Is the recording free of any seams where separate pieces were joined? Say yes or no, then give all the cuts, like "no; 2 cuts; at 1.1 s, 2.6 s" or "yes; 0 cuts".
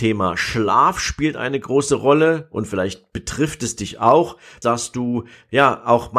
no; 1 cut; at 4.6 s